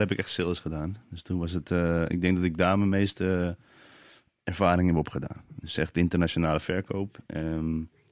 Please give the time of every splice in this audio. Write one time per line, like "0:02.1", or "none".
none

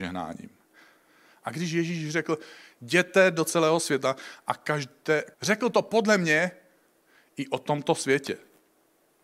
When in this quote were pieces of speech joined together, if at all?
0:05.3

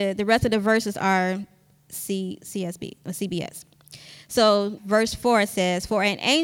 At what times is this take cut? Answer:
0:04.8

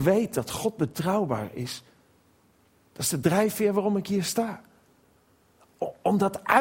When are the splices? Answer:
none

